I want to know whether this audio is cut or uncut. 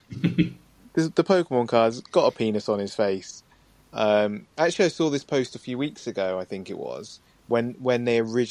uncut